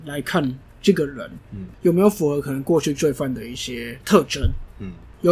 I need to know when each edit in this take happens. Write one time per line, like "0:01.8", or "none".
none